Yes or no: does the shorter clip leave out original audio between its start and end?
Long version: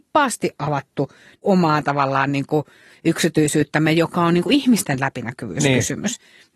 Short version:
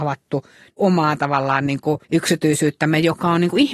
yes